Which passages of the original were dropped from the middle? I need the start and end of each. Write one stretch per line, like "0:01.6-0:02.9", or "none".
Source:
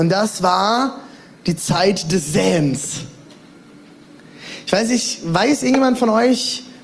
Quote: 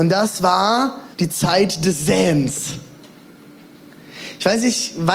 0:01.1-0:01.4

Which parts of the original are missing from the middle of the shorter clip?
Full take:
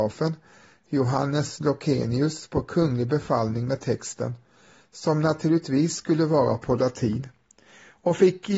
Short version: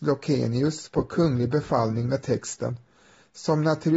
none

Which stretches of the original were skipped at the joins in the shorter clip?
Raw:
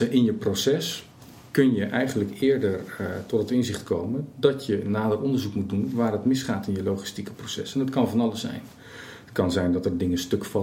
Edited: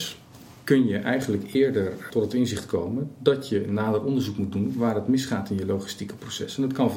0:03.0-0:03.3

